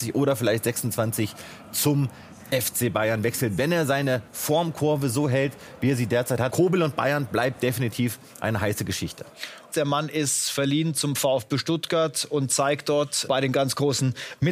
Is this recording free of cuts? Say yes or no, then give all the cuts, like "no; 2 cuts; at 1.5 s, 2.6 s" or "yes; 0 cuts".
no; 3 cuts; at 6.5 s, 9.7 s, 13.3 s